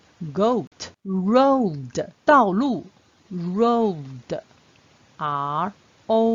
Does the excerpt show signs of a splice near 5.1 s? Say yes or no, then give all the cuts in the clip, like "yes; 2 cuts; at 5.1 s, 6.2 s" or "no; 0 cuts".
no; 2 cuts; at 0.9 s, 2.2 s